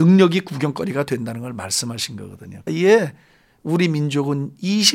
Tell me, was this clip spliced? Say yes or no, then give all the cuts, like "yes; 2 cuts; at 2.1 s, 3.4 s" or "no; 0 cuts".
yes; 1 cut; at 2.7 s